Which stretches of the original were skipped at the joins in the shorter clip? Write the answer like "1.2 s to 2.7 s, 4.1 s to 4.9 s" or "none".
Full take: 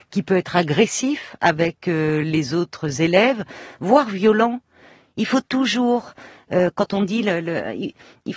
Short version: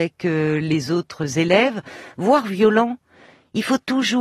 none